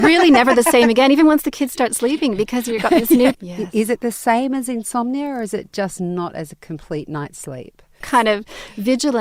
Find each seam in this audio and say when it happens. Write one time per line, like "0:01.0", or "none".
0:03.3
0:08.0